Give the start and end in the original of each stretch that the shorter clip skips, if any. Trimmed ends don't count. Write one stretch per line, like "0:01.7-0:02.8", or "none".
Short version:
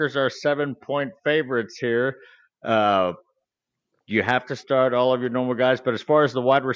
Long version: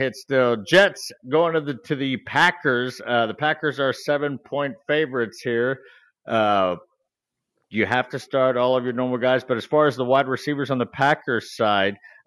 none